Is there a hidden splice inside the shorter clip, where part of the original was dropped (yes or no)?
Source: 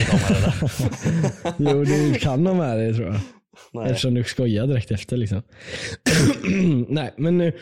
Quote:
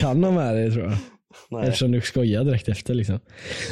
no